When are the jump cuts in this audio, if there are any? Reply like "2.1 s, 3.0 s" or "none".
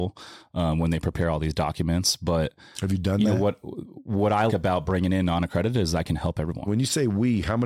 4.5 s, 6.7 s